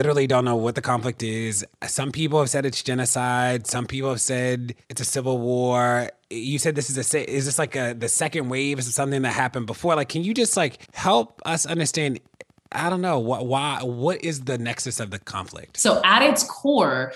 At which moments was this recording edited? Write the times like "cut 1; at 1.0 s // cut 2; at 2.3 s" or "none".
cut 1; at 10.9 s